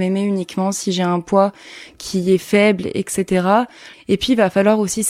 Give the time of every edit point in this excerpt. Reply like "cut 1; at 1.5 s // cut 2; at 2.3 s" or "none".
cut 1; at 3.9 s